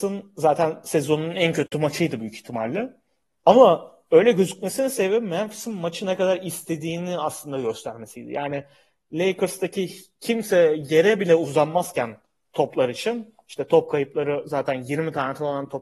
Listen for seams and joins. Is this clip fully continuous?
yes; 0 cuts

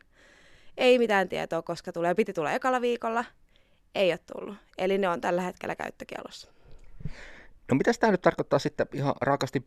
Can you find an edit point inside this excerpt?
no; 0 cuts

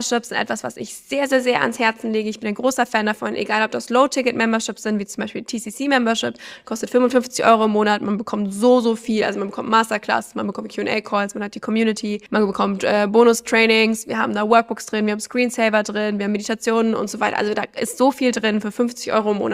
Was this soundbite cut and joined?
no; 0 cuts

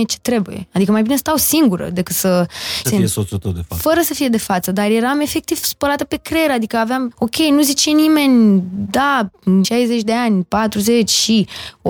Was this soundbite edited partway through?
yes; 3 cuts; at 2.8 s, 7.1 s, 9.6 s

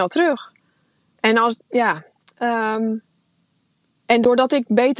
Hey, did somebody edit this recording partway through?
yes; 1 cut; at 2.2 s

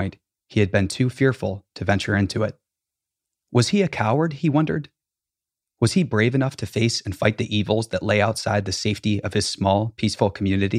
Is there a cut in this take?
no; 0 cuts

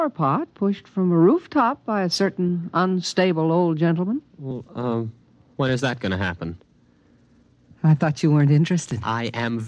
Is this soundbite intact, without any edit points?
yes; 0 cuts

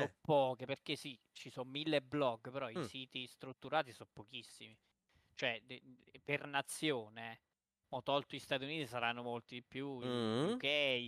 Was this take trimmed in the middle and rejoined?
no; 0 cuts

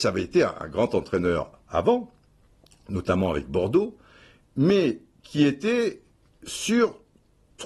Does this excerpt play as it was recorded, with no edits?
yes; 0 cuts

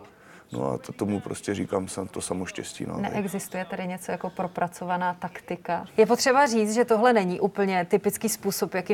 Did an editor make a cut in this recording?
yes; 1 cut; at 5.9 s

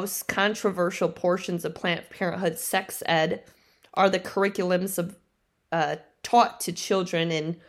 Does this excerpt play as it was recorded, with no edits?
yes; 0 cuts

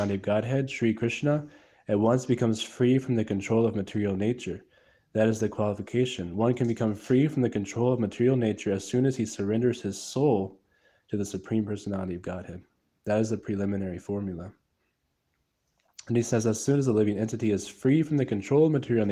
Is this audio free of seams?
yes; 0 cuts

